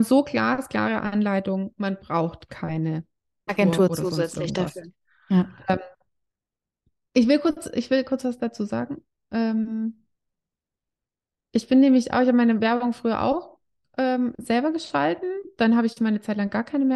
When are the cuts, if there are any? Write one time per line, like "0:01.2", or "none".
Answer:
0:03.5